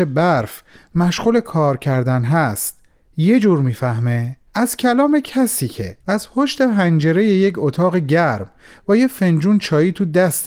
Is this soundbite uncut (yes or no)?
no